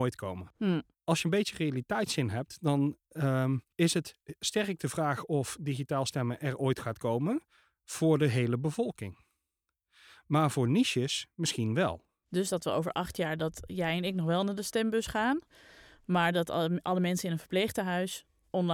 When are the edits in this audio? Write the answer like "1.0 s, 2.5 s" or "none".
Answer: 3.7 s